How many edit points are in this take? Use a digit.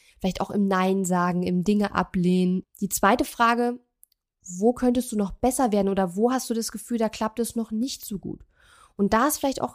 1